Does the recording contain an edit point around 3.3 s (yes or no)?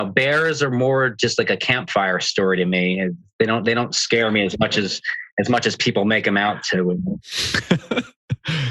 no